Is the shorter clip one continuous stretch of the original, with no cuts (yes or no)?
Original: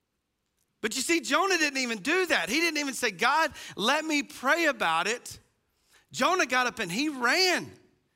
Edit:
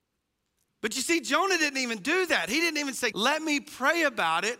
no